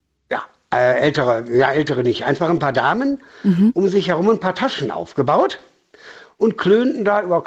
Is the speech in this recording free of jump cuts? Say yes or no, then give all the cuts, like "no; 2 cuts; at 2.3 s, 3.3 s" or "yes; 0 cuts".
yes; 0 cuts